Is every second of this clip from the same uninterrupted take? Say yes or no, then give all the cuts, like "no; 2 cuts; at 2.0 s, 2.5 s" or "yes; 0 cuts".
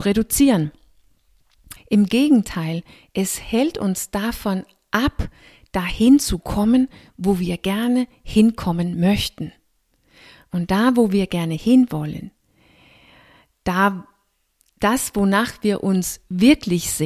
no; 1 cut; at 1.8 s